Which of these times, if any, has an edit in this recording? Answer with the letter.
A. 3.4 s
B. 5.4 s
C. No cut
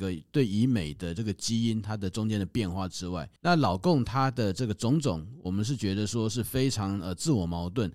A